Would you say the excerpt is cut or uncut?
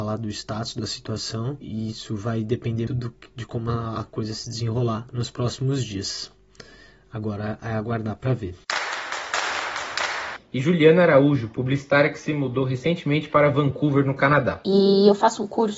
cut